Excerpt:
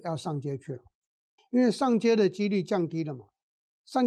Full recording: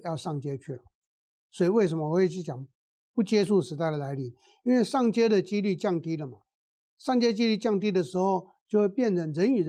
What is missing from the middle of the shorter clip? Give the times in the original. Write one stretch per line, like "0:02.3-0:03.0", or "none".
0:01.4-0:04.5